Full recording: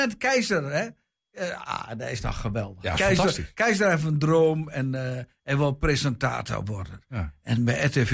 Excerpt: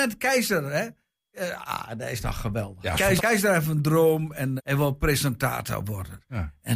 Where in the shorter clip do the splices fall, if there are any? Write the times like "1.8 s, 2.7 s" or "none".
3.2 s, 4.6 s